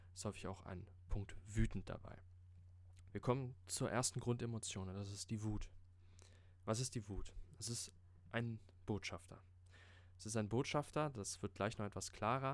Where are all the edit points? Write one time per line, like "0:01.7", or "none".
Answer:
0:03.1

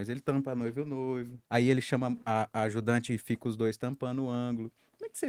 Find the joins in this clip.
0:01.4

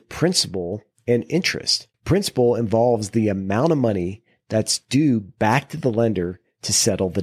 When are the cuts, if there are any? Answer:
0:01.9

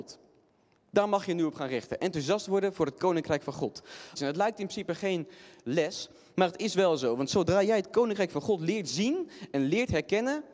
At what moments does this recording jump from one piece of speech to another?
0:04.2

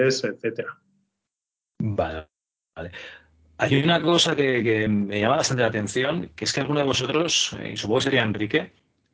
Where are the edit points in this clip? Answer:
none

